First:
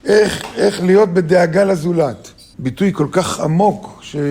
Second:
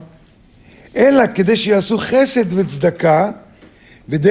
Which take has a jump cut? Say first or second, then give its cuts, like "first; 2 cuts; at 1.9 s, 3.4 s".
first; 1 cut; at 2.5 s